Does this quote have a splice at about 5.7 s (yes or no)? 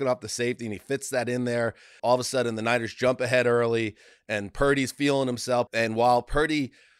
yes